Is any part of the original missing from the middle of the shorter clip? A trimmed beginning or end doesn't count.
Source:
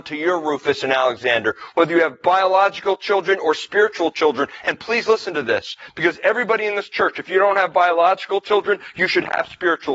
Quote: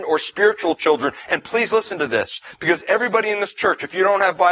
no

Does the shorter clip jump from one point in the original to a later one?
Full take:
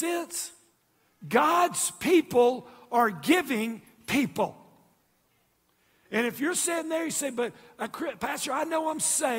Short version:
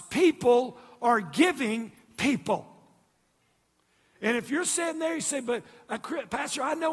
no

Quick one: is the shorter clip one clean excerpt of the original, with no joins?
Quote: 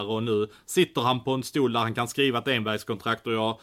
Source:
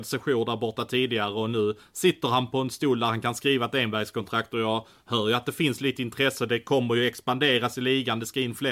yes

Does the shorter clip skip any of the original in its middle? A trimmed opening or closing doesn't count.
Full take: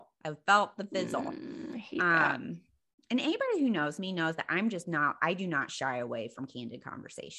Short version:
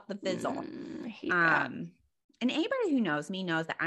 no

